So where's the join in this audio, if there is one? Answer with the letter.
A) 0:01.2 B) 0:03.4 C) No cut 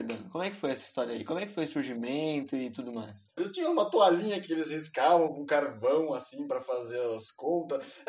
B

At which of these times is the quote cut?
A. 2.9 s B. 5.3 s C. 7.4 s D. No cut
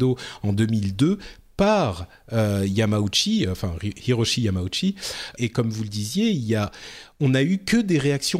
B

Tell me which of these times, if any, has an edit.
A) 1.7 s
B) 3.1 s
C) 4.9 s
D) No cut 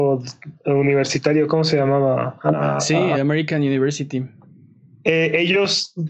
B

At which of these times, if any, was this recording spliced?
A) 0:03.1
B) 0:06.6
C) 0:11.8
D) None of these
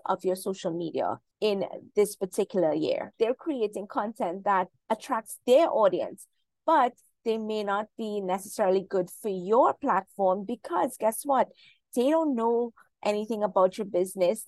A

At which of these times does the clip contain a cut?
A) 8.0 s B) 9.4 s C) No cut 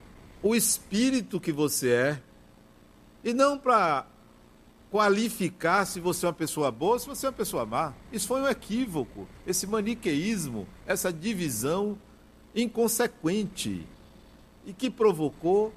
A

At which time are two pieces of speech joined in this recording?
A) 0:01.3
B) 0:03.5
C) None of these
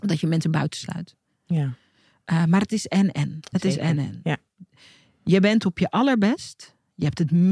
B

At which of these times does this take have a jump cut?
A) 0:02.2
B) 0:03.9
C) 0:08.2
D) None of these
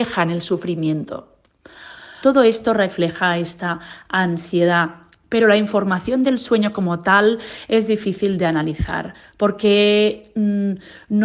A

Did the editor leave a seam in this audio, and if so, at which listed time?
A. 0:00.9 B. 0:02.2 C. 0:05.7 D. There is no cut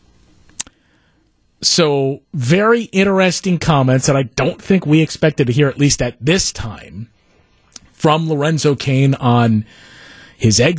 B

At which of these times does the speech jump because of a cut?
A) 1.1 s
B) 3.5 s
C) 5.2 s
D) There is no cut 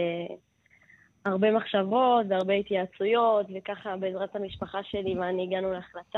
D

